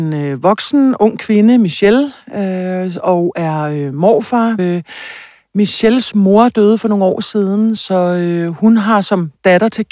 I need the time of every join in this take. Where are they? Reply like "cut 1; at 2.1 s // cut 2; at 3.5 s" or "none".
cut 1; at 4.6 s // cut 2; at 7.8 s